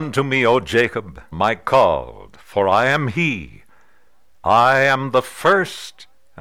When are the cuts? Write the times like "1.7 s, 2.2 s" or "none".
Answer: 1.3 s